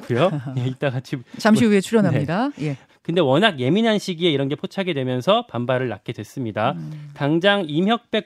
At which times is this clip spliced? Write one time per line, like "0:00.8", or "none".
0:02.9